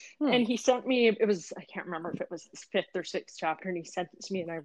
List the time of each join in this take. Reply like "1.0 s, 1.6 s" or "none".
none